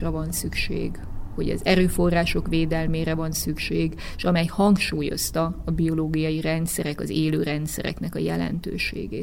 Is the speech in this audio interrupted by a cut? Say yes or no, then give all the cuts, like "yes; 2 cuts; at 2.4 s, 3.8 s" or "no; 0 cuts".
no; 0 cuts